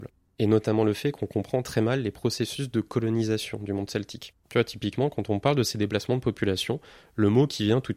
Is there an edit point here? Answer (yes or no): yes